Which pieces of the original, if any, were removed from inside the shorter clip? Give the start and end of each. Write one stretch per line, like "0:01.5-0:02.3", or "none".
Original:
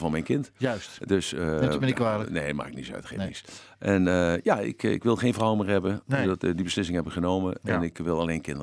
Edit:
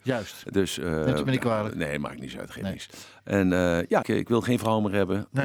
0:04.6-0:04.8